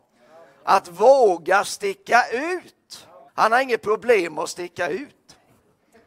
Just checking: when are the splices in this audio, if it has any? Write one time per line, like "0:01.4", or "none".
0:03.3